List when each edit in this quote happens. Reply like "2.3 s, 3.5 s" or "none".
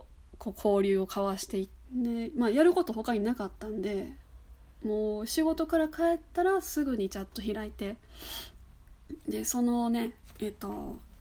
1.8 s